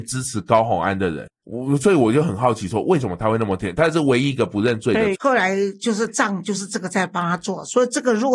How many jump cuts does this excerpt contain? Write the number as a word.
two